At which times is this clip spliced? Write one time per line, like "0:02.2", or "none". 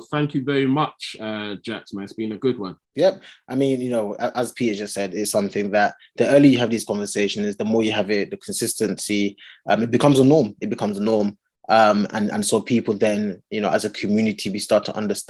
0:02.8

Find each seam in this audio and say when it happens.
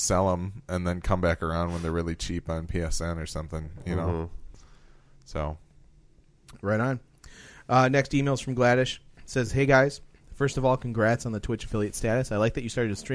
none

